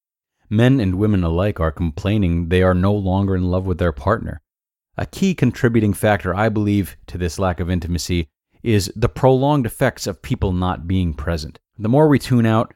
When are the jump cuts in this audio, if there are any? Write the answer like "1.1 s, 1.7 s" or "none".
11.7 s